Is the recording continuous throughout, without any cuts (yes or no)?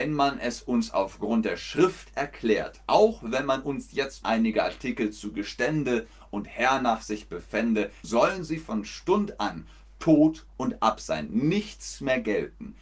no